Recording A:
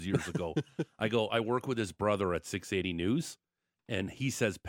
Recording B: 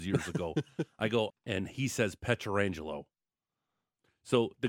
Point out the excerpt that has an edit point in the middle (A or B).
B